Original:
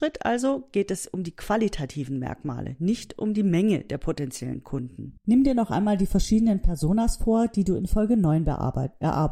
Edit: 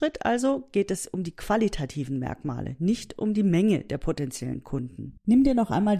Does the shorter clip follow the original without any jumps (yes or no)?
yes